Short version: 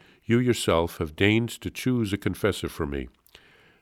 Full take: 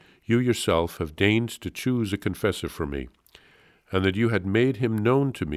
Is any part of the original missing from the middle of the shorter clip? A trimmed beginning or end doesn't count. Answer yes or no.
no